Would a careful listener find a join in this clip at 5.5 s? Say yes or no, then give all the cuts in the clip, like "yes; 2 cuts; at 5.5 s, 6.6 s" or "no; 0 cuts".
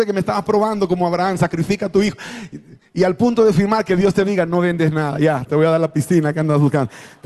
yes; 1 cut; at 5.5 s